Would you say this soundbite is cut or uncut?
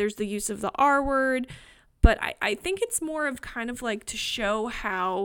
uncut